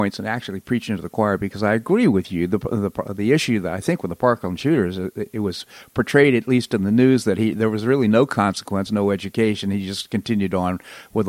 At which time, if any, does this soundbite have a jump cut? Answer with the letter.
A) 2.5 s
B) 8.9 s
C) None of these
B